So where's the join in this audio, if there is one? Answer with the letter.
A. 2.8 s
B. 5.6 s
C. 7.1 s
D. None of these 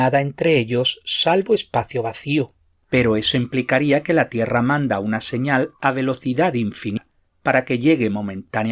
A